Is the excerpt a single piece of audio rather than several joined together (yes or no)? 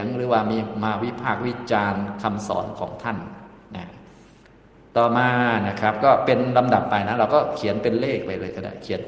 yes